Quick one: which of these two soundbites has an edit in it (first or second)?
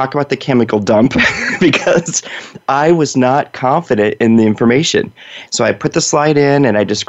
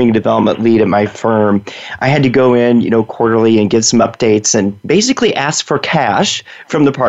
first